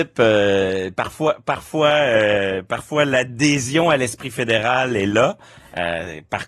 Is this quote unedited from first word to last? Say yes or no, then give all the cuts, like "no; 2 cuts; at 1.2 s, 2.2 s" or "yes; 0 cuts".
yes; 0 cuts